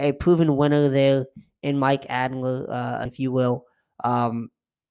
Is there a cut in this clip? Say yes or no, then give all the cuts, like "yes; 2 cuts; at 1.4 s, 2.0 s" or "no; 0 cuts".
yes; 1 cut; at 3.1 s